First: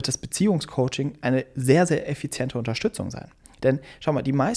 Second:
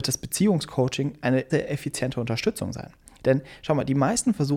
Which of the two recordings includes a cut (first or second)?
second